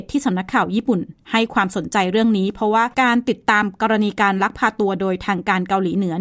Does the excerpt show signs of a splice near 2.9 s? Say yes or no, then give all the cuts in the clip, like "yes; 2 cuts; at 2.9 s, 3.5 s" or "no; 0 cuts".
yes; 1 cut; at 2.9 s